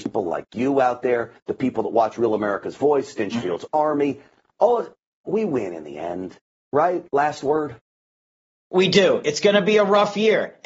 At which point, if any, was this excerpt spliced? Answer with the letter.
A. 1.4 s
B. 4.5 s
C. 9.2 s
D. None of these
A